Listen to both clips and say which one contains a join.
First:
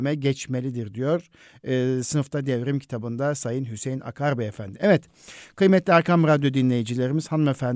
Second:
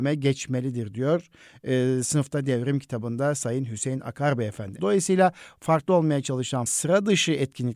second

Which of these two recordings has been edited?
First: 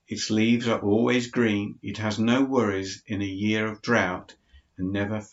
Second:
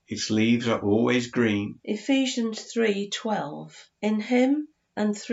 second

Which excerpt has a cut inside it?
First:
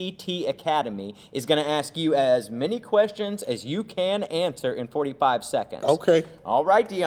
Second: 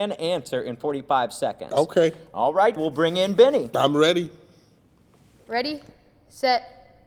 second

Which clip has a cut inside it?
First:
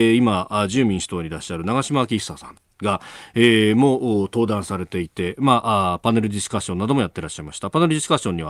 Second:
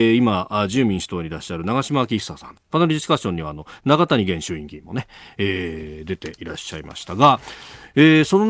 second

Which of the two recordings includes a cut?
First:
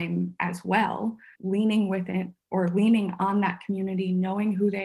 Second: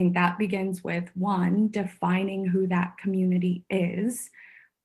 first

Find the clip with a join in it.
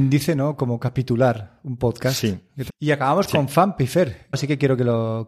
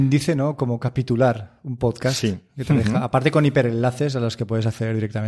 first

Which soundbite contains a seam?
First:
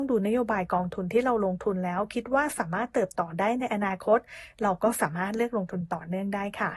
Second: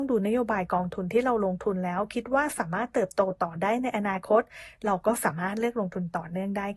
first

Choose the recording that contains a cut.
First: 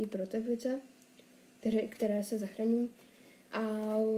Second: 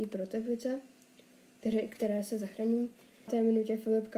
second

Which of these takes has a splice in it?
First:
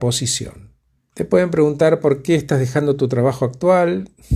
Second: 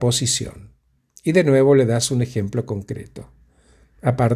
first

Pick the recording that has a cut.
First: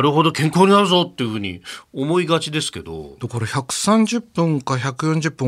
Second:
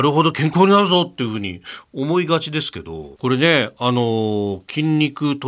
second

